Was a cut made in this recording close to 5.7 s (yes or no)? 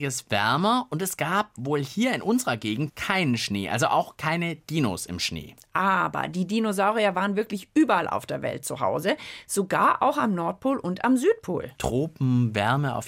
no